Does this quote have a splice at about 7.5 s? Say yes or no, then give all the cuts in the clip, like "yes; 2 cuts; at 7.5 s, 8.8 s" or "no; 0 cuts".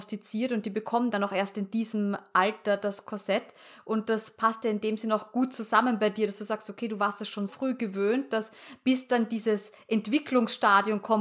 yes; 1 cut; at 7.5 s